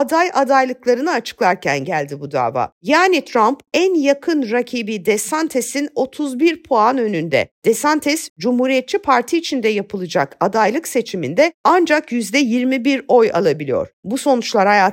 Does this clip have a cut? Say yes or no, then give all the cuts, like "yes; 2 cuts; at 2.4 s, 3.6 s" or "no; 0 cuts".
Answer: yes; 1 cut; at 2.7 s